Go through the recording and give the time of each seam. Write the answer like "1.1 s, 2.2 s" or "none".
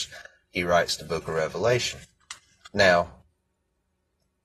2.6 s